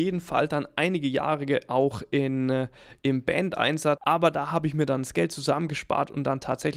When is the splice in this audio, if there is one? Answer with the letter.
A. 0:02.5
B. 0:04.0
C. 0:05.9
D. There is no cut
B